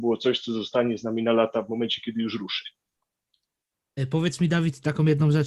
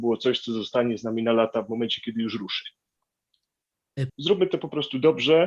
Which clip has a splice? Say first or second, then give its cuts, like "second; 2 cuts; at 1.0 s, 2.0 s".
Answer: second; 1 cut; at 4.1 s